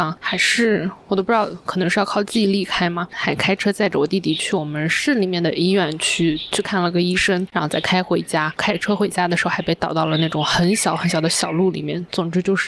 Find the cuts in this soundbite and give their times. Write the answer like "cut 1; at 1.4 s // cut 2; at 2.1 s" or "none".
cut 1; at 3.1 s